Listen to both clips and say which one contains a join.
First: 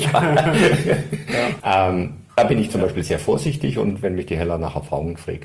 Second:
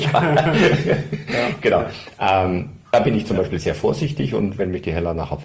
first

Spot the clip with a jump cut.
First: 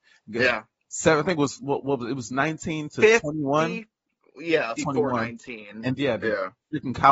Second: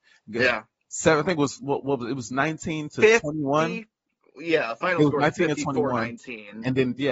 first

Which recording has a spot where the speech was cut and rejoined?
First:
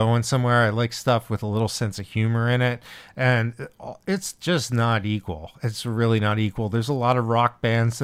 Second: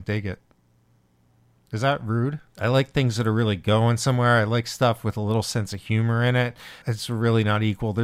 second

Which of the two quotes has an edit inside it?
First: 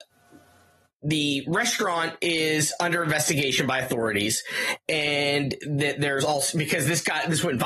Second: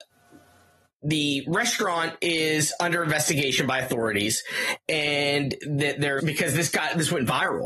second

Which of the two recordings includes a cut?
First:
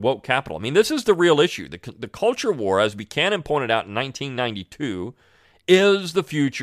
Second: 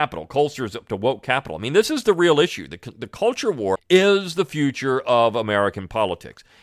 second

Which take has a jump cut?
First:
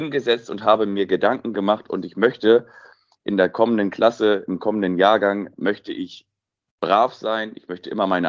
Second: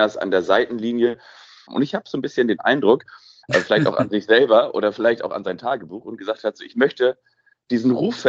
second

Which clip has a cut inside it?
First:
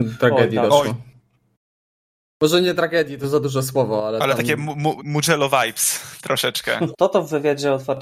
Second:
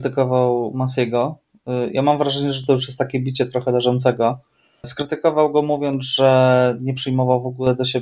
first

